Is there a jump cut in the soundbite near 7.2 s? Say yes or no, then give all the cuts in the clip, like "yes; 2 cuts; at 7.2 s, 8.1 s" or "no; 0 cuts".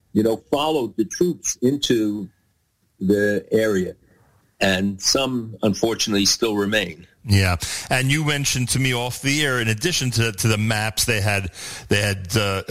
no; 0 cuts